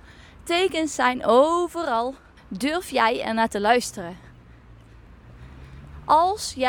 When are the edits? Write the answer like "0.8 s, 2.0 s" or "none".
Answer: 2.4 s